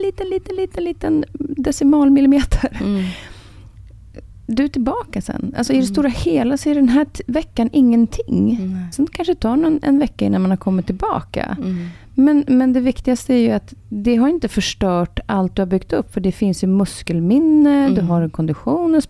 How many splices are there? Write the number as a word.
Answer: one